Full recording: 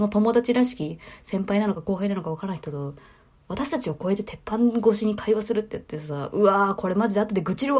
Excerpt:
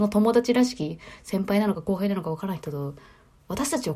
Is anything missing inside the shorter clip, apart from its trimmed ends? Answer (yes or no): no